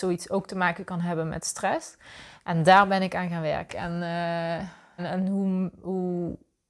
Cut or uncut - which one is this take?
cut